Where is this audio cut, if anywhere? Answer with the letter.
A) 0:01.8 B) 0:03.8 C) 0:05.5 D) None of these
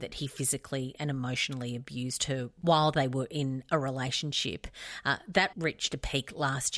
C